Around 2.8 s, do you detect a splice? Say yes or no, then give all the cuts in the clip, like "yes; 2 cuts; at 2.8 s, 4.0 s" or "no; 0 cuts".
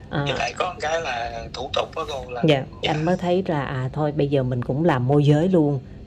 yes; 1 cut; at 2.8 s